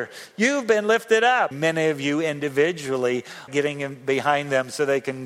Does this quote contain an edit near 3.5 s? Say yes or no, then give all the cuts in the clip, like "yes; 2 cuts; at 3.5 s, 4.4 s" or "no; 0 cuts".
yes; 2 cuts; at 1.5 s, 3.5 s